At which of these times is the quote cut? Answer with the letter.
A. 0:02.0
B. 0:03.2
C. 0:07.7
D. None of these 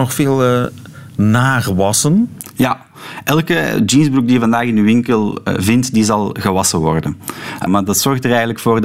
C